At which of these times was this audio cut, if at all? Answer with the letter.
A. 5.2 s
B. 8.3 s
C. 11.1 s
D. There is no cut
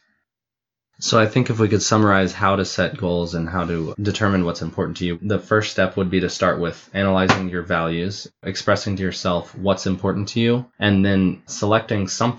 D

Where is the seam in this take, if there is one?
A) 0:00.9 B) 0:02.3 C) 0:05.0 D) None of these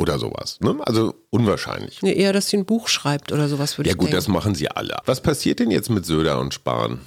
C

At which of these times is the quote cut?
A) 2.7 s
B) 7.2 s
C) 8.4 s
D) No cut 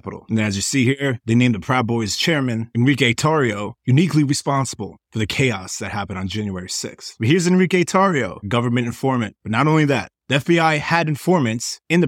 C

